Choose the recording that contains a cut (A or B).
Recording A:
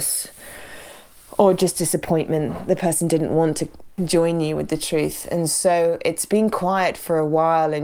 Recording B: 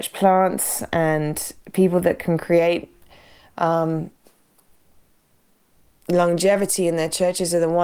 A